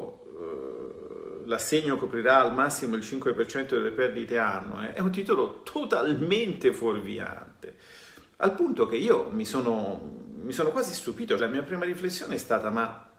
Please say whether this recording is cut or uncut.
cut